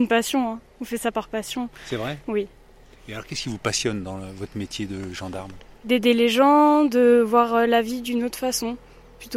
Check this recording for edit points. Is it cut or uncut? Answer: uncut